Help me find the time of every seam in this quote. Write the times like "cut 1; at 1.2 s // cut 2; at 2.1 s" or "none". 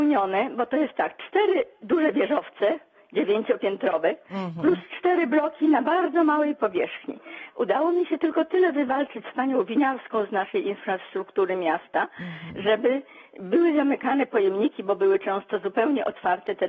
cut 1; at 7.5 s